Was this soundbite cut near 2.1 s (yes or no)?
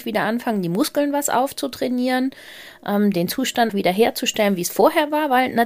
no